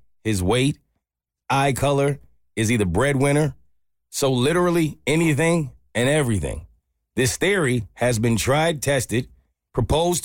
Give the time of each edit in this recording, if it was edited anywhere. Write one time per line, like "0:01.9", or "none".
none